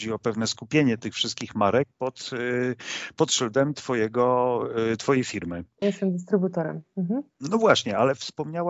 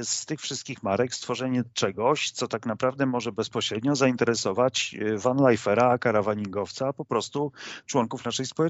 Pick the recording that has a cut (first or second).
first